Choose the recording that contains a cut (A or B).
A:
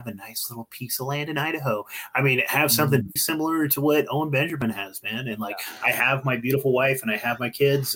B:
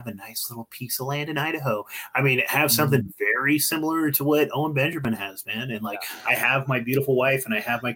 A